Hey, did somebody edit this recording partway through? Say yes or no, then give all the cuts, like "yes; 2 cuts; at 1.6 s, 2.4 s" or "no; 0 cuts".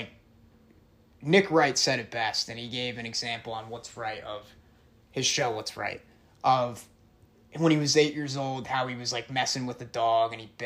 no; 0 cuts